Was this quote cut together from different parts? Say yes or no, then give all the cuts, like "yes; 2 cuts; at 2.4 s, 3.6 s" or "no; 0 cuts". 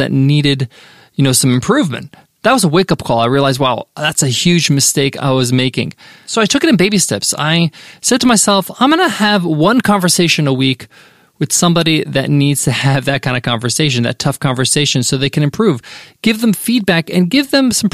no; 0 cuts